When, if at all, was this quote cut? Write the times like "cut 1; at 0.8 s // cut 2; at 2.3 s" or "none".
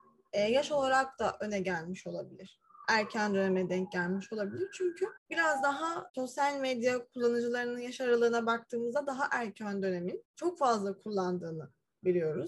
none